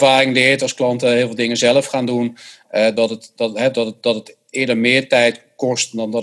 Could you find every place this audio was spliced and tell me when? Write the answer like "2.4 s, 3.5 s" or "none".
none